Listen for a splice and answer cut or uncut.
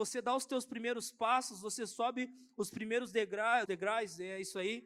cut